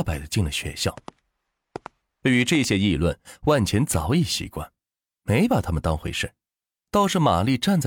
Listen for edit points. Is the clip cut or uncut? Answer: uncut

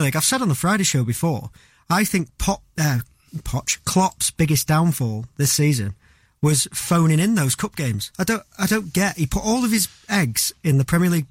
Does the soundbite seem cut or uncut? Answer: cut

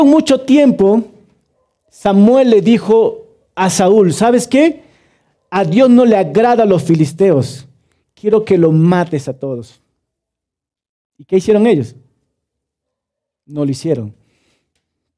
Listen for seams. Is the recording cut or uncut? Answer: uncut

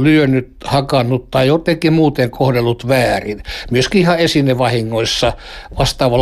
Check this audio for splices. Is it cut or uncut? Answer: uncut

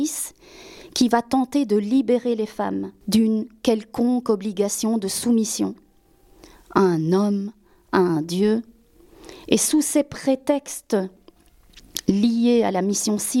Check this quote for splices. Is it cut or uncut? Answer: uncut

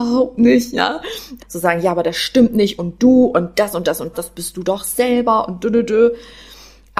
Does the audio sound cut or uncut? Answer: cut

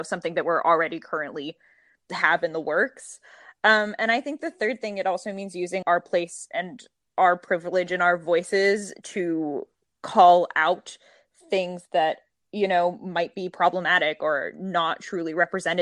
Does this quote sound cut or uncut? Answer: cut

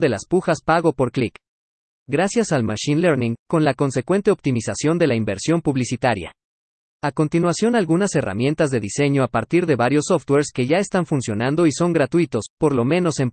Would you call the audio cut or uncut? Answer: cut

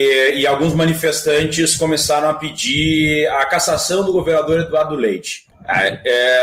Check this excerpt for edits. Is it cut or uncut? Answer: cut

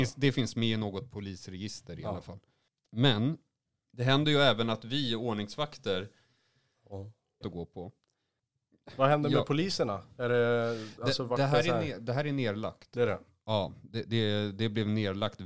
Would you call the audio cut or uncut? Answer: cut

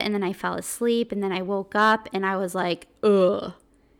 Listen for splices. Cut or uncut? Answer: uncut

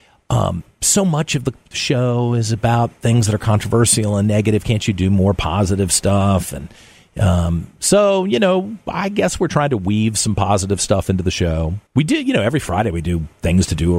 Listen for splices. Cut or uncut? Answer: cut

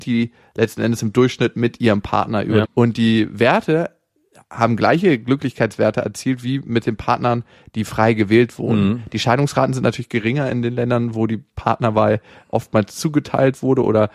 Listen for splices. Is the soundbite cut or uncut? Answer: cut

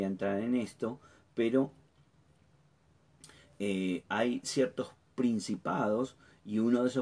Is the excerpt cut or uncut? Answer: cut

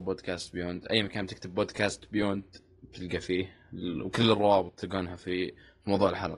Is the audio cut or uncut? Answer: uncut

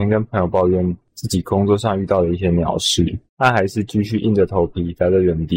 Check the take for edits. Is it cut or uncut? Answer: uncut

